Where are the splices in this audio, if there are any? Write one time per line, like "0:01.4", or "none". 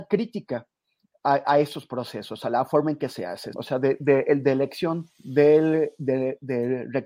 0:03.5
0:05.1